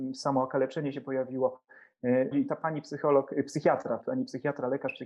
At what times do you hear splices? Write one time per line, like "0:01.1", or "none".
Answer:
0:02.3
0:04.0